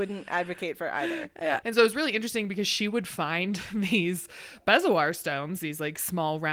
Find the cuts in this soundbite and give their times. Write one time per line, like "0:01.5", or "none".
0:01.6

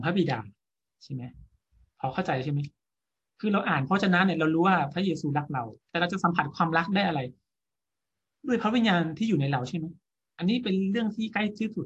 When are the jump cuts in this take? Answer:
0:05.8

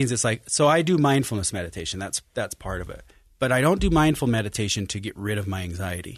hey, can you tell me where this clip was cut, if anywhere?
none

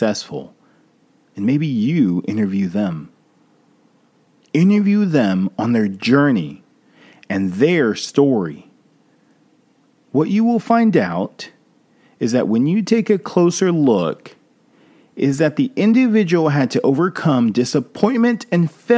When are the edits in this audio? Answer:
none

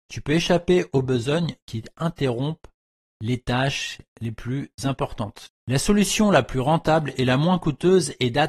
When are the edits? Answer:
0:05.5

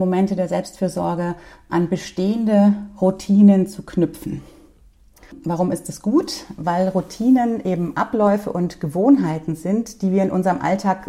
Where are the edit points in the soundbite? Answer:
0:01.7

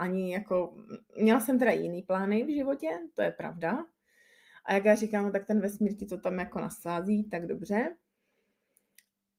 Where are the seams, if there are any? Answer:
none

